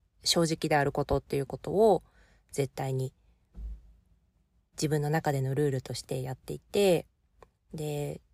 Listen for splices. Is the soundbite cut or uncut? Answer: uncut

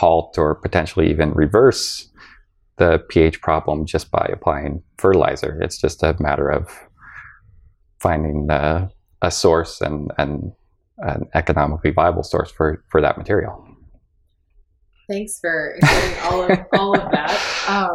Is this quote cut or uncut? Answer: uncut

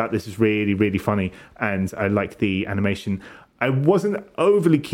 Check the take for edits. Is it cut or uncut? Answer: uncut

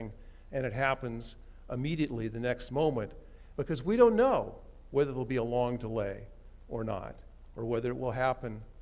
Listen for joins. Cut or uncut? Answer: cut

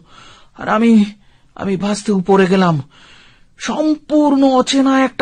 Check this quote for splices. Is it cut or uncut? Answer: cut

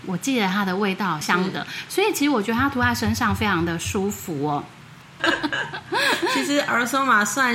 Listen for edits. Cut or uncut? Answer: cut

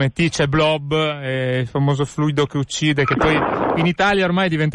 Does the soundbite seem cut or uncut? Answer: uncut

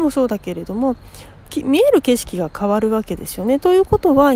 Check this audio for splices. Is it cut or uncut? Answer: uncut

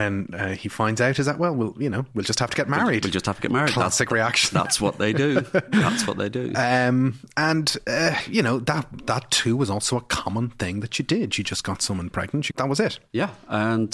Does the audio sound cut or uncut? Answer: cut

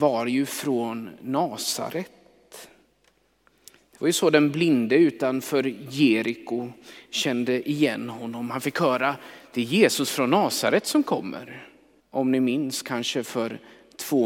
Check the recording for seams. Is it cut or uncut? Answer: cut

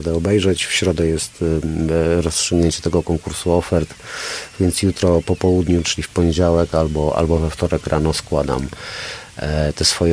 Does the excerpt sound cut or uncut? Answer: uncut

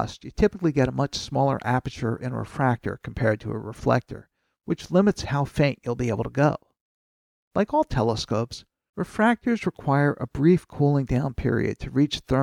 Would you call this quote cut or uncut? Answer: uncut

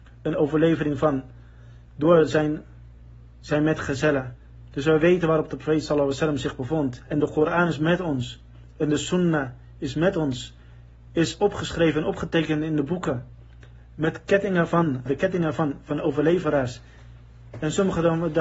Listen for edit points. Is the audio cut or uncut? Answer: cut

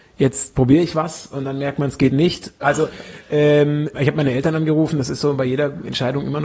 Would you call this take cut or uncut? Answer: cut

